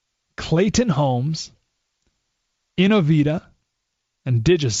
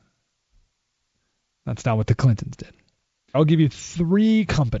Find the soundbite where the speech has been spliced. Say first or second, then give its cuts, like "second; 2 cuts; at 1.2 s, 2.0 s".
second; 1 cut; at 3.3 s